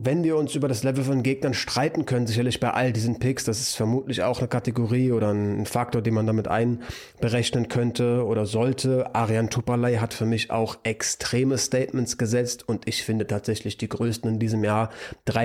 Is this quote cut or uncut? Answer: uncut